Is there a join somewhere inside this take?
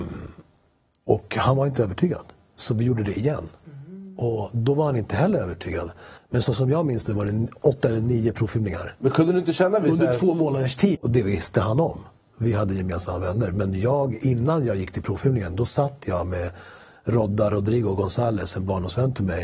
yes; 2 cuts; at 6.2 s, 10.9 s

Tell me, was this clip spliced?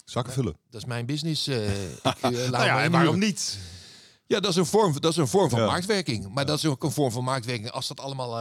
no; 0 cuts

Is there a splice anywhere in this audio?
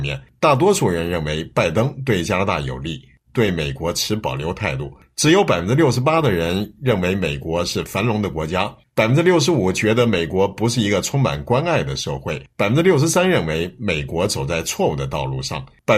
yes; 2 cuts; at 3.3 s, 8.8 s

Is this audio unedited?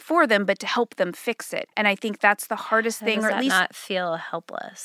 no; 1 cut; at 1.7 s

